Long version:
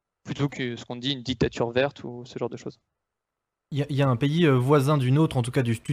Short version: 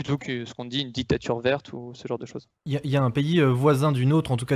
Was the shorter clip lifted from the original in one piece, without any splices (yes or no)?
no